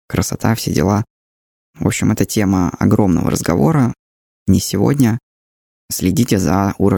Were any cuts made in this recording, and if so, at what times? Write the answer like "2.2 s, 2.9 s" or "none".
none